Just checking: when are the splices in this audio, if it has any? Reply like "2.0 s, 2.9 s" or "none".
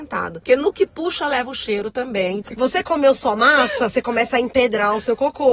2.4 s